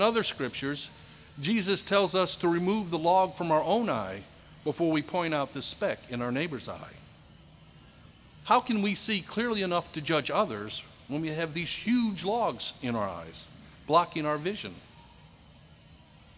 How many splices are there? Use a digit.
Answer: 0